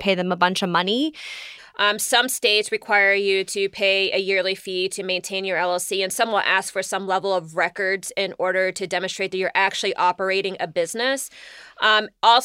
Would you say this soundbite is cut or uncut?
cut